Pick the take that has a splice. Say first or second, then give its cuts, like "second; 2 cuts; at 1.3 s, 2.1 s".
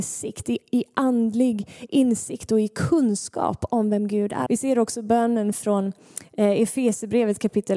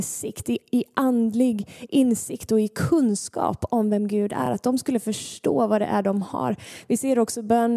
first; 1 cut; at 4.5 s